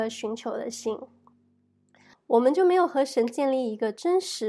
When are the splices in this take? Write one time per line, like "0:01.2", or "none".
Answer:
0:02.1